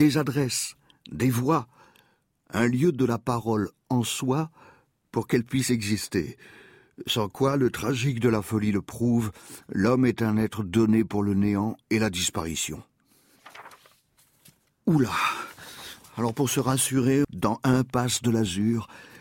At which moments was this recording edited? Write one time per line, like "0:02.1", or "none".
0:17.2